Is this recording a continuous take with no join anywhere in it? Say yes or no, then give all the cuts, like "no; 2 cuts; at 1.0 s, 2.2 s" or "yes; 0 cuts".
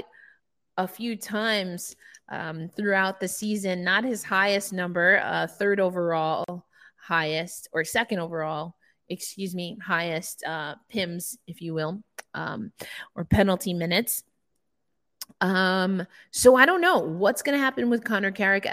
yes; 0 cuts